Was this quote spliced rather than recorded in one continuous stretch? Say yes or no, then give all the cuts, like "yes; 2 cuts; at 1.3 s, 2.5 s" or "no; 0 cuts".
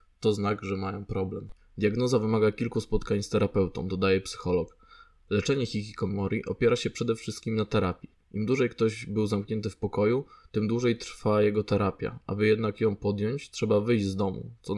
yes; 1 cut; at 1.6 s